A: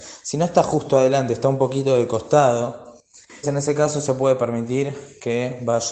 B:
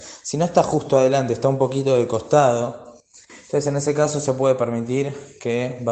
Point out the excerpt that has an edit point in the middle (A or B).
A